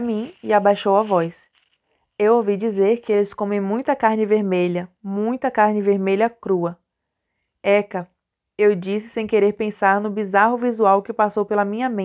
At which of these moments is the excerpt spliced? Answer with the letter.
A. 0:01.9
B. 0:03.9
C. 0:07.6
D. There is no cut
D